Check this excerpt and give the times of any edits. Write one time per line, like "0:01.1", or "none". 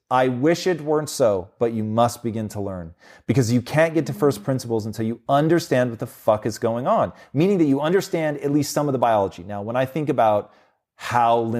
none